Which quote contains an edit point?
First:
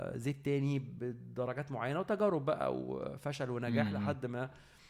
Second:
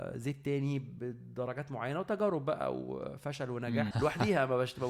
second; 1 cut; at 3.9 s

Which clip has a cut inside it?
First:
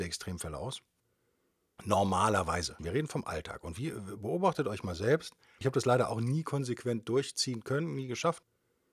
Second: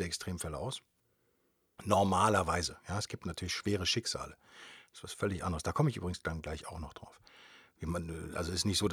first; 2 cuts; at 2.8 s, 5.6 s

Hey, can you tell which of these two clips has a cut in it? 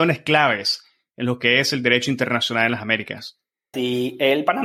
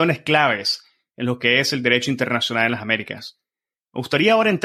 first; 1 cut; at 3.7 s

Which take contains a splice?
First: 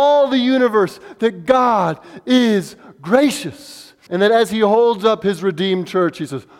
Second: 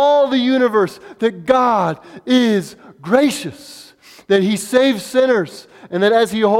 first; 1 cut; at 4.1 s

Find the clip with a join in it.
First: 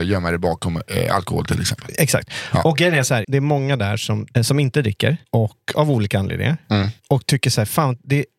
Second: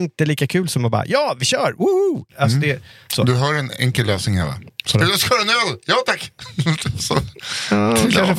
first; 2 cuts; at 3.2 s, 4.3 s

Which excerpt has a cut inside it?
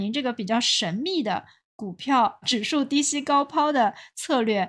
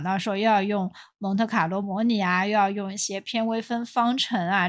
first; 1 cut; at 2.4 s

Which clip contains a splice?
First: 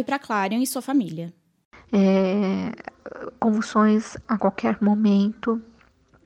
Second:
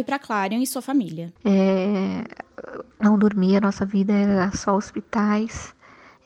second; 2 cuts; at 1.4 s, 2.9 s

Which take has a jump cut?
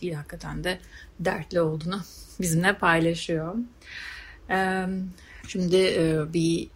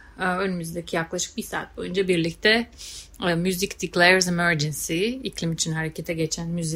first; 1 cut; at 5.4 s

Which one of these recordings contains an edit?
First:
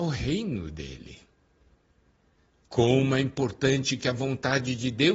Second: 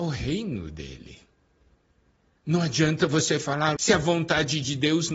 second; 2 cuts; at 2.4 s, 3.8 s

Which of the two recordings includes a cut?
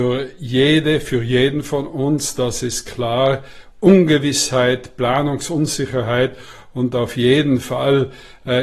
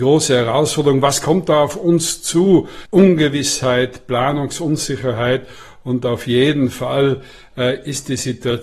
second; 1 cut; at 2.9 s

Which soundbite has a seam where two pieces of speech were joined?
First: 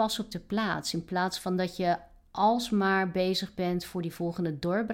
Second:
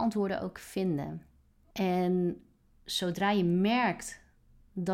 second; 1 cut; at 1.7 s

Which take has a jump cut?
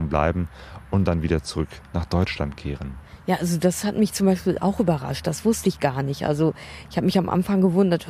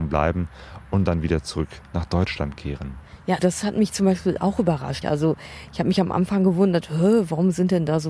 second; 2 cuts; at 3.4 s, 5.0 s

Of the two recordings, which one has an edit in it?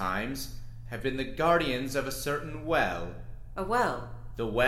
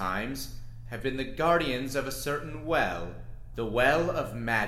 second; 1 cut; at 3.5 s

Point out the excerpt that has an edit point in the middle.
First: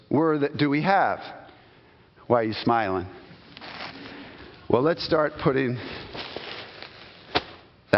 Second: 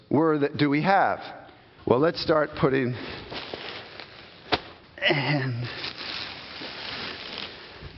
second; 2 cuts; at 1.8 s, 4.8 s

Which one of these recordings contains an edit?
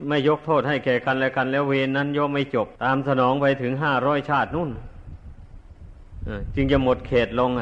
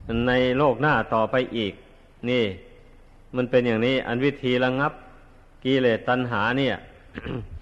first; 1 cut; at 2.8 s

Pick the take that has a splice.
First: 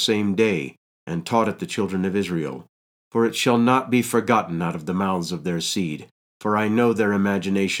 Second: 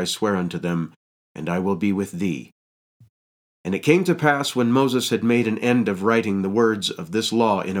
first; 1 cut; at 2.9 s

